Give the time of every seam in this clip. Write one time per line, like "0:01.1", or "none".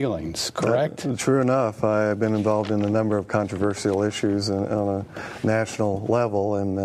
none